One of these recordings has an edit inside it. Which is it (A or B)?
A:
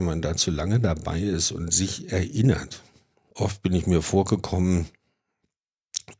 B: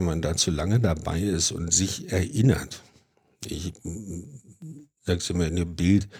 A